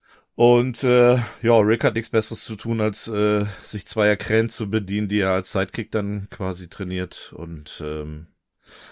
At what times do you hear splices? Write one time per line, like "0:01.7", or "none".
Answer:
none